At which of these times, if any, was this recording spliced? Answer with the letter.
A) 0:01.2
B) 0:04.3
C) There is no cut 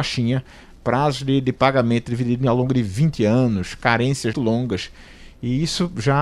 B